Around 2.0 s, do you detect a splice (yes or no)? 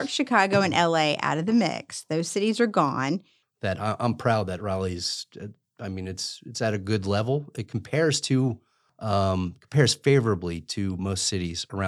no